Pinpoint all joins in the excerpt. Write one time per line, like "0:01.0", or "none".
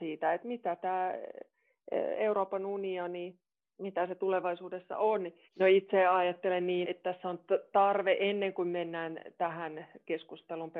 0:05.5
0:06.8